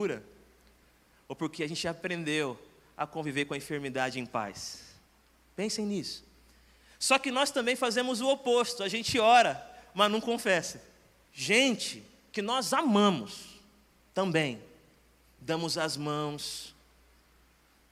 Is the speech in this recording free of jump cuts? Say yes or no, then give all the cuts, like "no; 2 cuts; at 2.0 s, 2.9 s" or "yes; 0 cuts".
no; 1 cut; at 11.2 s